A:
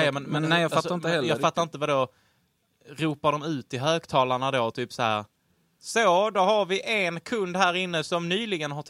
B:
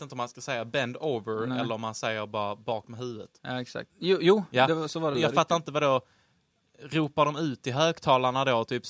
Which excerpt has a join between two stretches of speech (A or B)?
B